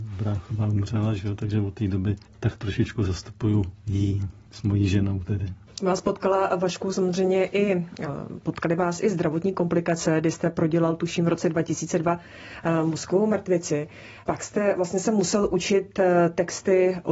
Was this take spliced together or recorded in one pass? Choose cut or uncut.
uncut